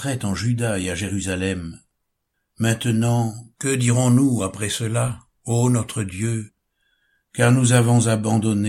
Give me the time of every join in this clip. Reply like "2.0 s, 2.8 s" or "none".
none